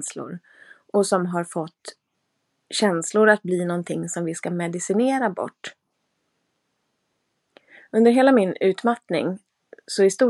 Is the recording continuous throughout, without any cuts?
yes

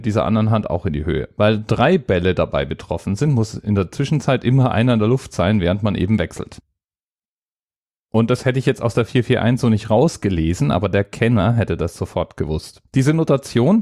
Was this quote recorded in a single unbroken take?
no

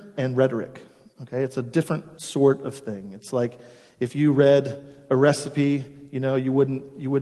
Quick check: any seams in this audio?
no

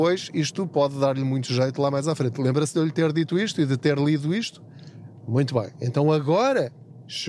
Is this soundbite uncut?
yes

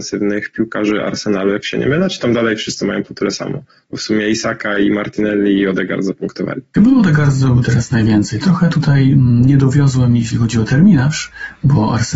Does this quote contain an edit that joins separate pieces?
no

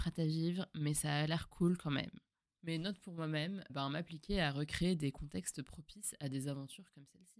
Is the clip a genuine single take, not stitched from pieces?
no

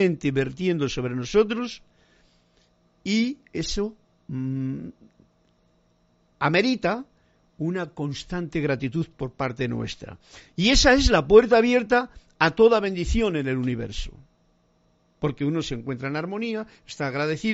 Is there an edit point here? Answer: no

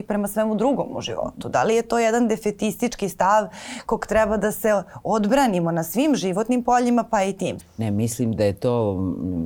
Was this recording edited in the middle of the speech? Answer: yes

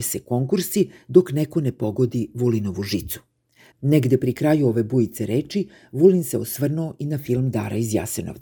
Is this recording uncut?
no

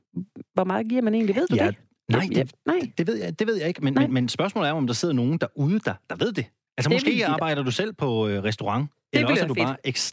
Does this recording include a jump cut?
no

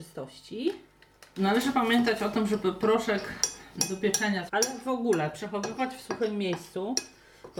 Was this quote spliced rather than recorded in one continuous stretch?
yes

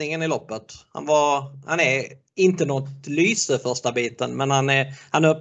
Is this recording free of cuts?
no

